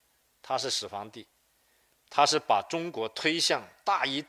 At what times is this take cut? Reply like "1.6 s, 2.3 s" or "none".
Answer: 1.9 s